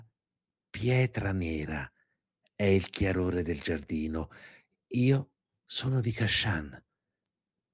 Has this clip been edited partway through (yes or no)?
no